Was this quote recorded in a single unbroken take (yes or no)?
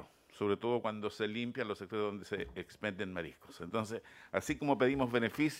no